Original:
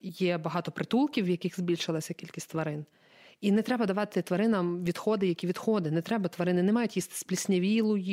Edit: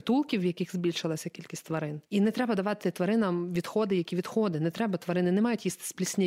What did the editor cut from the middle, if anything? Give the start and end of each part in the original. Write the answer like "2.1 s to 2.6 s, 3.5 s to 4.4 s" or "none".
2.9 s to 3.4 s

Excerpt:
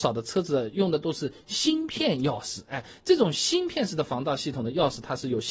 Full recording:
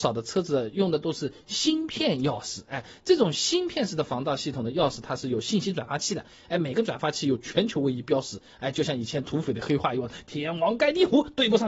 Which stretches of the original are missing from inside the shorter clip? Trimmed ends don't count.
none

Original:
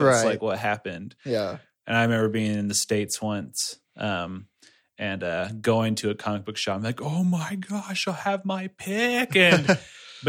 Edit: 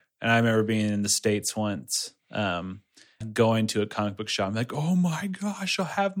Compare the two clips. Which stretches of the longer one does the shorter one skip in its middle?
4.9 s to 5.5 s

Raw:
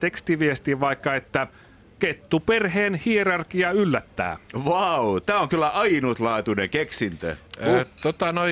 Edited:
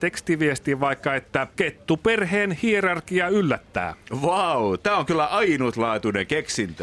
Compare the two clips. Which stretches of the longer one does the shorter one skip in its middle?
1.5 s to 1.9 s

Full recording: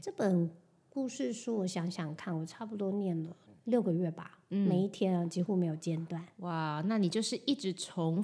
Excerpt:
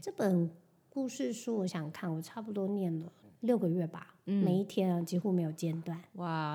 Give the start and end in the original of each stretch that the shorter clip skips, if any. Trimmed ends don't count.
1.7 s to 1.9 s

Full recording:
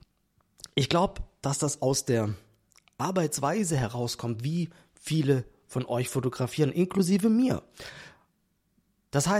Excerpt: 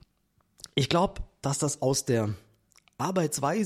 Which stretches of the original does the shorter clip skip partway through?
none

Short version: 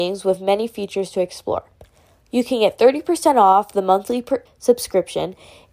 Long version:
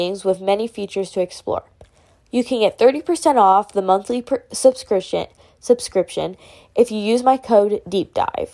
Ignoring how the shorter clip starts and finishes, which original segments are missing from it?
4.5 s to 5.5 s

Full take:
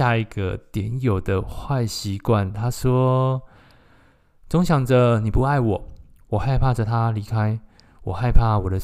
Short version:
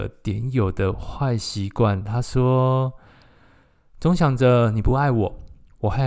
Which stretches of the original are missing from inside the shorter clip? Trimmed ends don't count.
none

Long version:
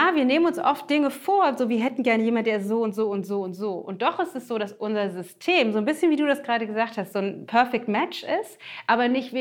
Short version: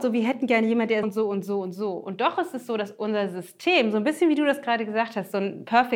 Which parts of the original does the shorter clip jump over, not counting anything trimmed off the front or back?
2.6 s to 2.8 s

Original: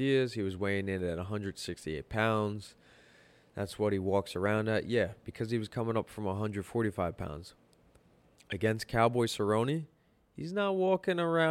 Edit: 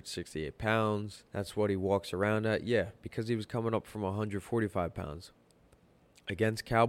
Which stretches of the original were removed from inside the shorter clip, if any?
2.8 s to 3.5 s

